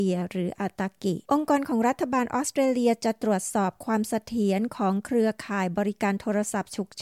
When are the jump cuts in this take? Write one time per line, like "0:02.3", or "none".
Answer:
0:01.2